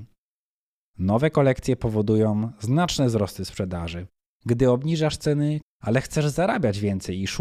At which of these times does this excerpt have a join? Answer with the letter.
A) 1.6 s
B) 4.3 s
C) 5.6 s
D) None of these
C